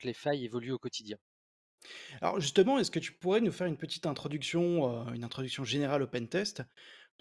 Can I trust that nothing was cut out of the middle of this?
yes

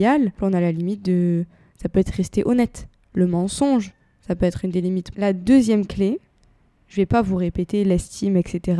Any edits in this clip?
yes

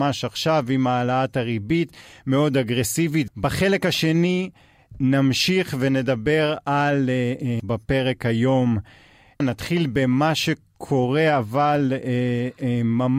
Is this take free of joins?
no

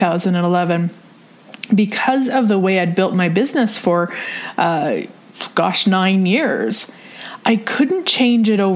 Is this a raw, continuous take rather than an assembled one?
yes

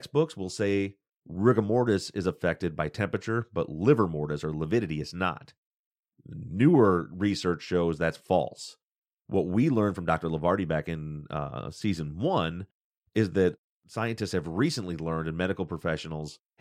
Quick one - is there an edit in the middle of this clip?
yes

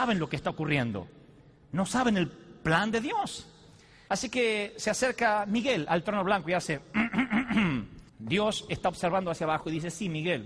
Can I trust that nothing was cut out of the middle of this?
no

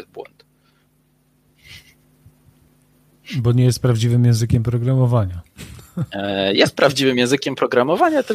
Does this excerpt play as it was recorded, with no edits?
yes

